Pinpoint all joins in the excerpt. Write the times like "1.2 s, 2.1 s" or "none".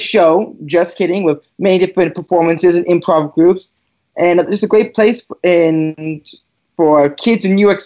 none